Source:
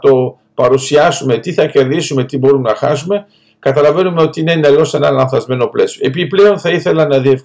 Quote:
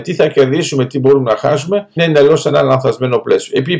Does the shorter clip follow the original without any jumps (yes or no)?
no